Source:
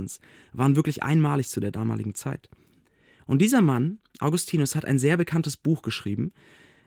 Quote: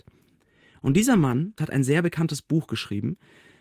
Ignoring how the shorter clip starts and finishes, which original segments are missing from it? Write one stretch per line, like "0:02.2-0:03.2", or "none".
0:04.0-0:04.7